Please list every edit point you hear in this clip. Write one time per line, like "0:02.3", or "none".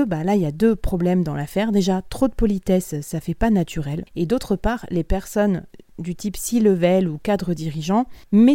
none